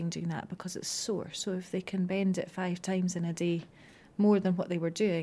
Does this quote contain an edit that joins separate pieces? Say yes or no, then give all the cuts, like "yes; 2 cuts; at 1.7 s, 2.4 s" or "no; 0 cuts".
no; 0 cuts